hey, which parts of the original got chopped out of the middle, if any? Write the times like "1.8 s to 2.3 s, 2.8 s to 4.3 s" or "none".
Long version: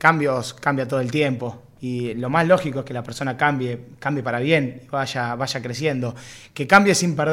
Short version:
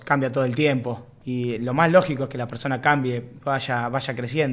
4.0 s to 4.9 s